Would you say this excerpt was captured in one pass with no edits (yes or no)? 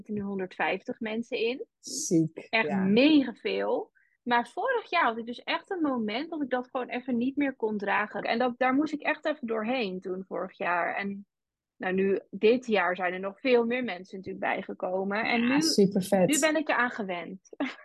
no